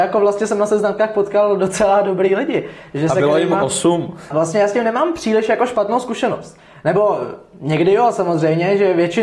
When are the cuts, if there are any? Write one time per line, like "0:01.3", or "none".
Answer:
0:04.3